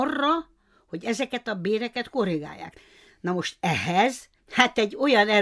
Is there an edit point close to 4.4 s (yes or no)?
yes